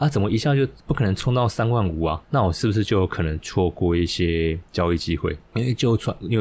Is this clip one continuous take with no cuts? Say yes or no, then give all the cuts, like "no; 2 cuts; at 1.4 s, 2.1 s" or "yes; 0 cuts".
yes; 0 cuts